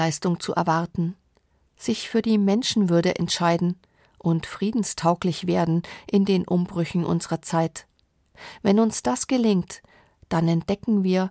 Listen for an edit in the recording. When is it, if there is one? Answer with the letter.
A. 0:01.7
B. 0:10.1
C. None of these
A